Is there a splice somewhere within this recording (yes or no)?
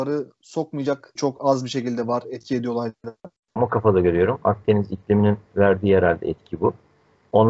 yes